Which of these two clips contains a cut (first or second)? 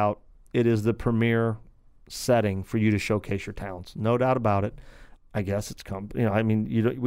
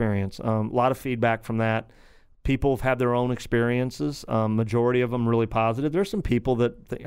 first